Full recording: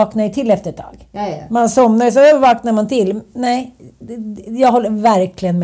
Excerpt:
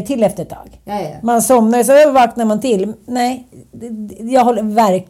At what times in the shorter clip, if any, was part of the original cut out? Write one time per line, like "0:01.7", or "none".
none